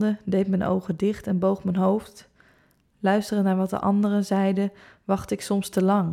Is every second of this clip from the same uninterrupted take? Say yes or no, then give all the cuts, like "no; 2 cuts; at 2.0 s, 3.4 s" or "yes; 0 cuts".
yes; 0 cuts